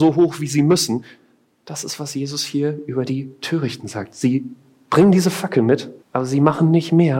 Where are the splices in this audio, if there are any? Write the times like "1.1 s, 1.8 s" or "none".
6.0 s